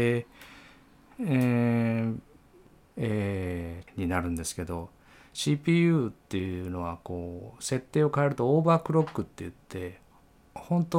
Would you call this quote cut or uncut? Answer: cut